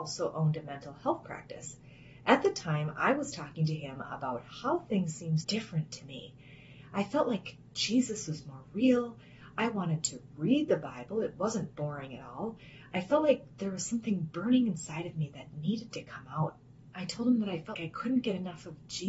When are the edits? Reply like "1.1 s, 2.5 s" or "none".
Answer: 5.4 s, 17.7 s